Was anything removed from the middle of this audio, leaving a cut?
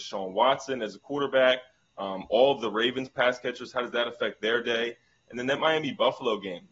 no; 0 cuts

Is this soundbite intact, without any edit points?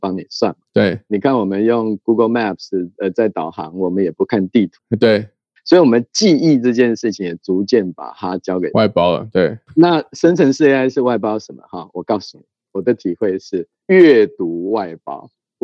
yes; 0 cuts

